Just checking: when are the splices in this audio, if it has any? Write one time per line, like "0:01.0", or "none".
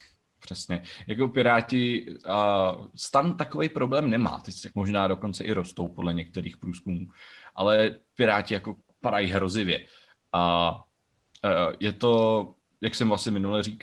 0:04.7